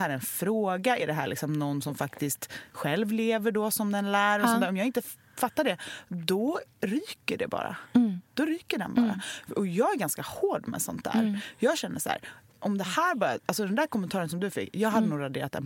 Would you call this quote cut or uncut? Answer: uncut